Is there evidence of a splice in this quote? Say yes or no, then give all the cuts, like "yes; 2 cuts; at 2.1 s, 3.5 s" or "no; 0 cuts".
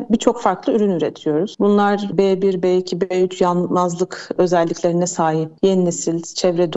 no; 0 cuts